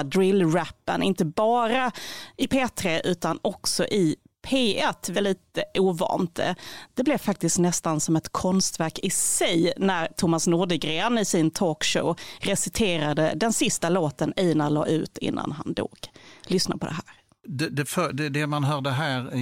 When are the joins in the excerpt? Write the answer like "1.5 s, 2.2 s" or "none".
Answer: 5.1 s